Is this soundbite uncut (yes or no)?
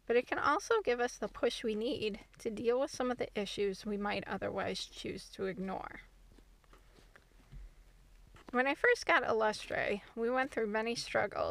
yes